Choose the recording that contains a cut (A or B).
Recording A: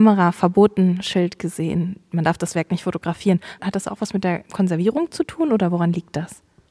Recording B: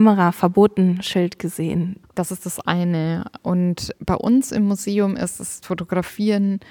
B